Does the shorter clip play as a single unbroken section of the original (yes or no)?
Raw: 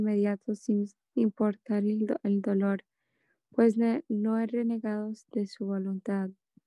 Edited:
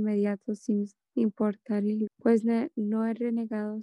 no